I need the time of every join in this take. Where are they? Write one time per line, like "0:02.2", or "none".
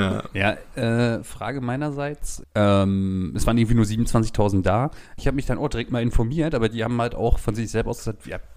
0:02.4
0:05.2